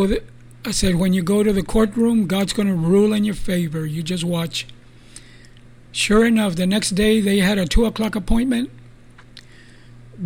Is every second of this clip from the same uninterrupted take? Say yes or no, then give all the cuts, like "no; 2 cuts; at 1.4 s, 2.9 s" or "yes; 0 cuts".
yes; 0 cuts